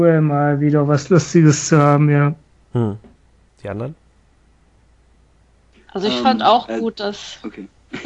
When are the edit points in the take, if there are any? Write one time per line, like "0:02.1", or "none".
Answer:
0:03.5